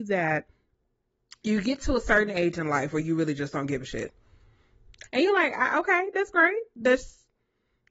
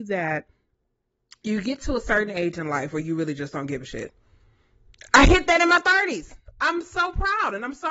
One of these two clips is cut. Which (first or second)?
first